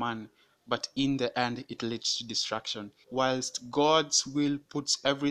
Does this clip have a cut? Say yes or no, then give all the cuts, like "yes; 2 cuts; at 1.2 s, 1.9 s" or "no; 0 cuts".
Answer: yes; 1 cut; at 3.0 s